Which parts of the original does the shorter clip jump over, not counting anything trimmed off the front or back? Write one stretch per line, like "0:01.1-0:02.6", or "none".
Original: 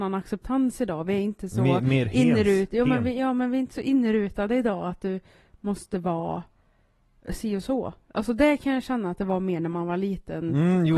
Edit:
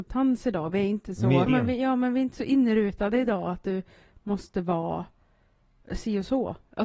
0:01.8-0:02.8